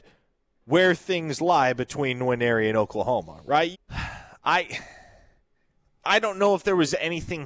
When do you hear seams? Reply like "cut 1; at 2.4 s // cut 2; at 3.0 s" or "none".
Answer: cut 1; at 3.7 s

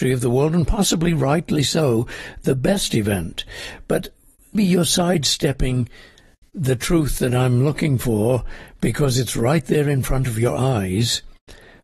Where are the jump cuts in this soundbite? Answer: cut 1; at 4.5 s

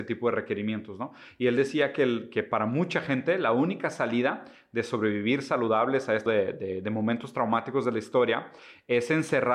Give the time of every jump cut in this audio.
cut 1; at 6.3 s

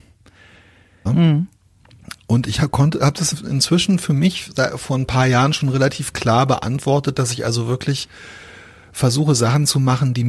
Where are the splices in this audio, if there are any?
cut 1; at 1.1 s

